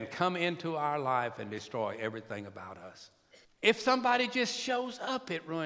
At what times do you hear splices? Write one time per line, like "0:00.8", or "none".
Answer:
0:03.4